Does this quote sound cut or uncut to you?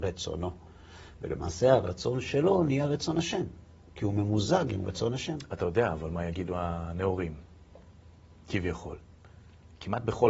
uncut